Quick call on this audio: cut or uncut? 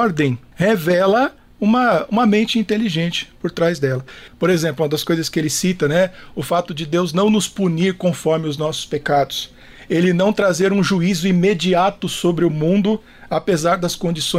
uncut